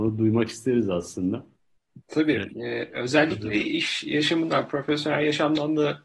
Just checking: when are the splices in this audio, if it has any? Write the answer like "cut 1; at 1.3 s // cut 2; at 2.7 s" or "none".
none